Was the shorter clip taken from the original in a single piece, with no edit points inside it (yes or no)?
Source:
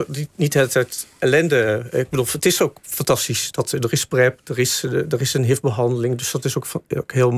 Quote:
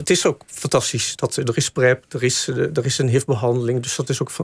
yes